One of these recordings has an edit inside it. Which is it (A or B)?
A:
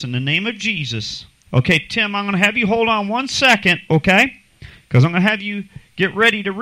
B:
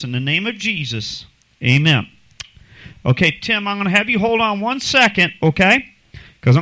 A